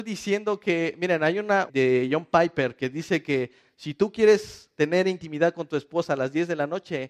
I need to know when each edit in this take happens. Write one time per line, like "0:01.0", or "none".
0:01.7